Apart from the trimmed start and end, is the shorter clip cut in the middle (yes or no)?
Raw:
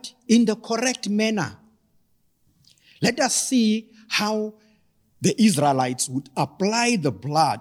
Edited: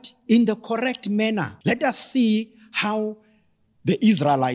yes